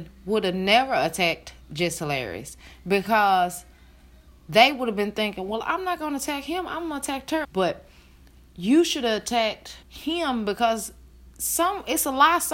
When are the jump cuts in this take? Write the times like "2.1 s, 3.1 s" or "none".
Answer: 7.4 s, 9.8 s